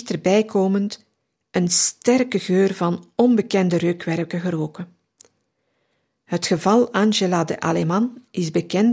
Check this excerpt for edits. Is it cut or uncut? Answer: uncut